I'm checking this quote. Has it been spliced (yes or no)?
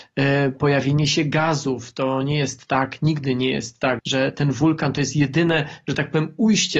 yes